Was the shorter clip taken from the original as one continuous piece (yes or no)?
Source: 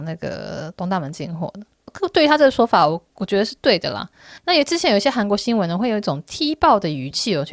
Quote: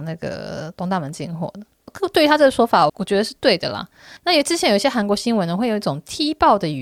no